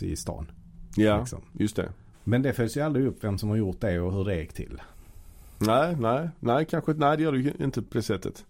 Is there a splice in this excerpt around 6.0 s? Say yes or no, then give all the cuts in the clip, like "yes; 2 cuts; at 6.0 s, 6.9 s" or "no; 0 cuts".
no; 1 cut; at 2.1 s